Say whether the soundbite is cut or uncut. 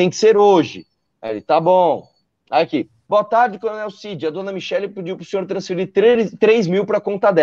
uncut